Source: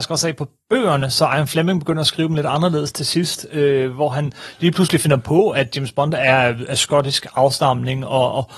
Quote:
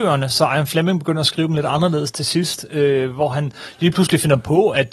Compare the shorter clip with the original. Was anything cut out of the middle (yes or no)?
no